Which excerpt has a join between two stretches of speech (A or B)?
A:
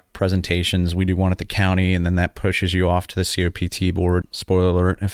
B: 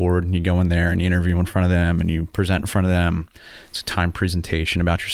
A